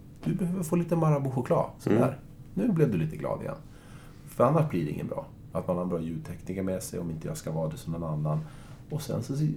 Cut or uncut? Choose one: cut